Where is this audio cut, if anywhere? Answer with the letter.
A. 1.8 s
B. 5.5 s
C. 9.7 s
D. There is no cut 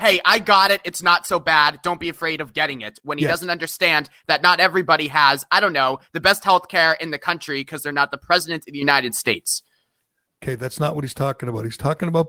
D